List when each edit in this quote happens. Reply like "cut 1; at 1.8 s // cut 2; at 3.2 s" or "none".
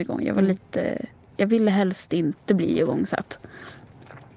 none